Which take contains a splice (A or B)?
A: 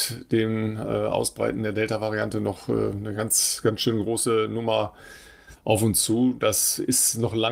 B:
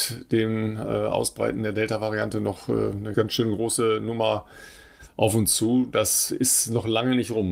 B